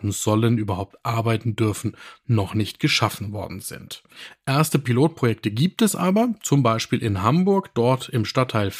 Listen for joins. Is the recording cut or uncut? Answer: uncut